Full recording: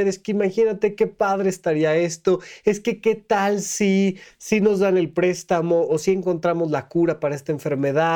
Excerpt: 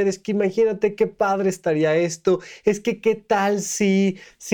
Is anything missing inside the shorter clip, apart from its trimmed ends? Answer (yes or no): no